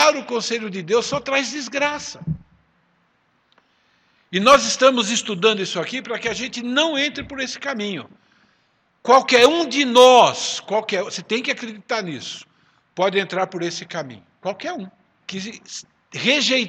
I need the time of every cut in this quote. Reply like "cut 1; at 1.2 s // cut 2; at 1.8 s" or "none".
cut 1; at 15.2 s